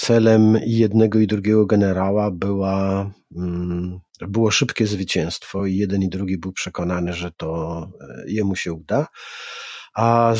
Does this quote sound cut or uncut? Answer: uncut